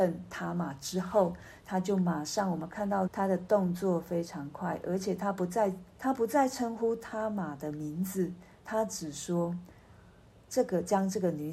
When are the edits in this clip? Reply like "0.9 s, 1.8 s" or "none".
3.1 s, 5.9 s